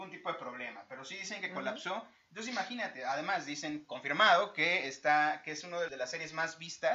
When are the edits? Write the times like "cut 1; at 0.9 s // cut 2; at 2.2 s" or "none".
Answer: cut 1; at 5.9 s

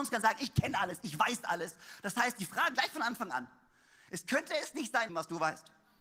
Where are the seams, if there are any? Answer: cut 1; at 2.7 s // cut 2; at 5.1 s

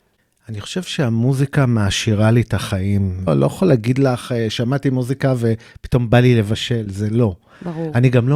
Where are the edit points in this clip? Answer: cut 1; at 3.3 s

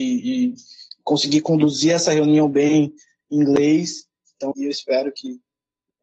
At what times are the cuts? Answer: cut 1; at 4.5 s

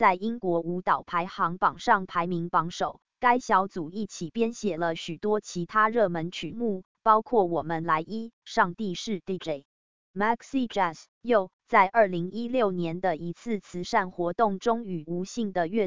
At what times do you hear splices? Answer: cut 1; at 3.0 s // cut 2; at 10.0 s

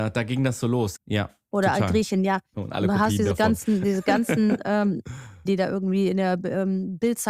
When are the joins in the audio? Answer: cut 1; at 1.0 s // cut 2; at 2.5 s // cut 3; at 5.5 s

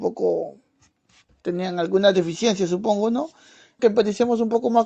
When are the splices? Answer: cut 1; at 3.8 s

